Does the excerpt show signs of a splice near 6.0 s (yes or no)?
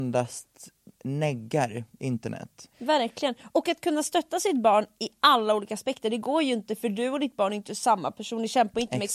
no